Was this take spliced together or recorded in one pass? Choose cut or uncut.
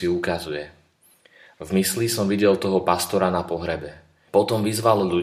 cut